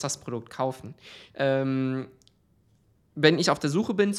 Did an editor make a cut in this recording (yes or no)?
yes